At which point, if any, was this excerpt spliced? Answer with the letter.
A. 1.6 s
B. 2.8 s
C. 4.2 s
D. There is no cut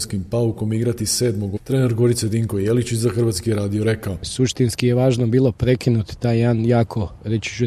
A